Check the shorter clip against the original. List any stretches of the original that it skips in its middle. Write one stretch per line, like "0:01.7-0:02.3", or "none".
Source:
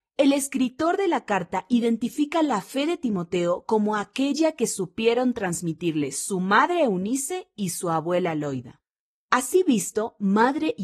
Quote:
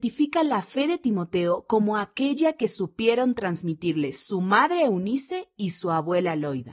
none